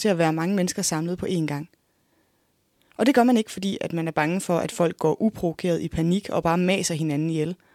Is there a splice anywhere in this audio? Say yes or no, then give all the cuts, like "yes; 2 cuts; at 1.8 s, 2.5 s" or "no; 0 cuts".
no; 0 cuts